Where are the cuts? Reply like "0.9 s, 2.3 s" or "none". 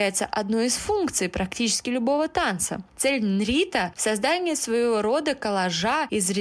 none